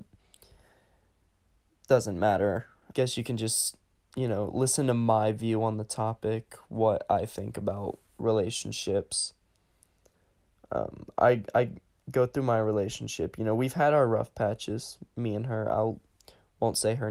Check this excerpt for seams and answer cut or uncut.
cut